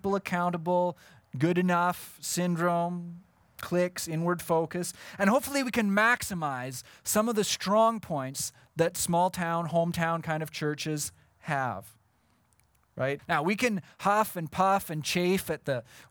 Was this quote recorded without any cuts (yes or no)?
no